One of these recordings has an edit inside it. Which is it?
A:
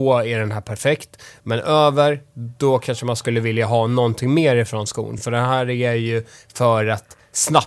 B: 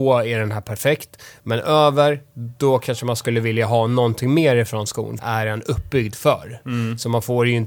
B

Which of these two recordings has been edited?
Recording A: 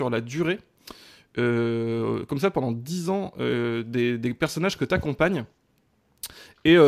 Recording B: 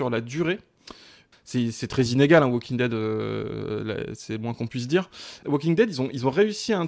B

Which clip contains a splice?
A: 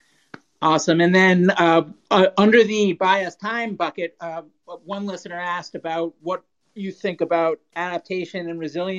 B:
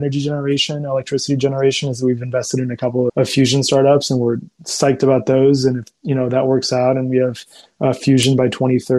B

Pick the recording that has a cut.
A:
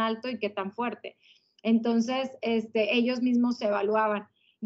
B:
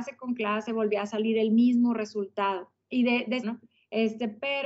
B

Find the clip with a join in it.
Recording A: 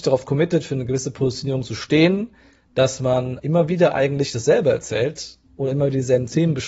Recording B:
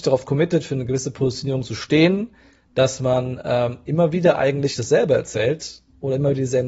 A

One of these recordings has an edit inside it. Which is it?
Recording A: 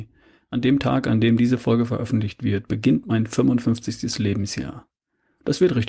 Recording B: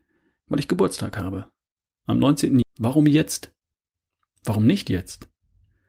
B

